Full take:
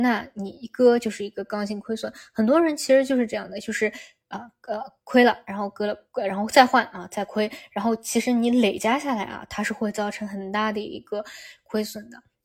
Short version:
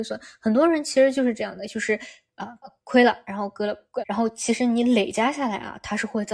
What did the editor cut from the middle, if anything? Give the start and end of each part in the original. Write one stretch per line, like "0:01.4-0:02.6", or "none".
0:04.5-0:04.8
0:06.2-0:07.7